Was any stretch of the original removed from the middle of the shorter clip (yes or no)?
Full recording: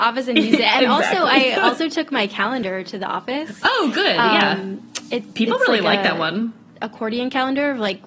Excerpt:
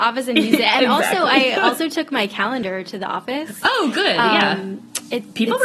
no